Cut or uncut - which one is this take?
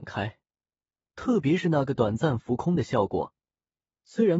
cut